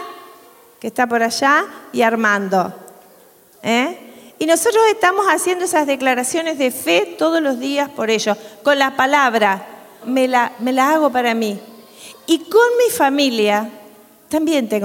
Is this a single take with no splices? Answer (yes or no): no